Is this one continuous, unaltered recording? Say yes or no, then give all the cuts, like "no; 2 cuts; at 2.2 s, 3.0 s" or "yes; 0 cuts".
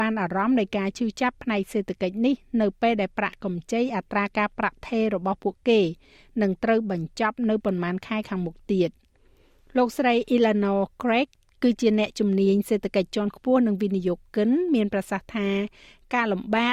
yes; 0 cuts